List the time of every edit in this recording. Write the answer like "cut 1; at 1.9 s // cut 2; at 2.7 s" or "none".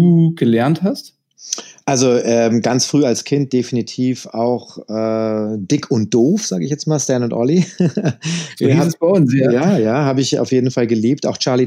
none